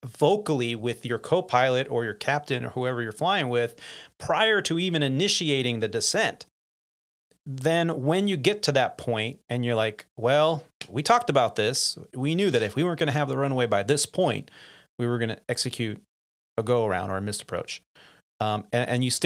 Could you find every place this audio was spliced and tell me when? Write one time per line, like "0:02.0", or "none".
none